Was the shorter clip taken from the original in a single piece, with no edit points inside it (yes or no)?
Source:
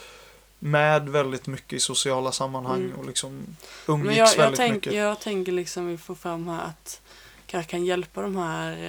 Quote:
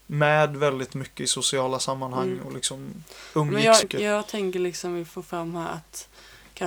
no